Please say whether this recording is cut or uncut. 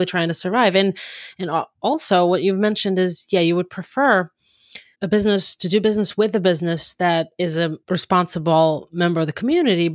cut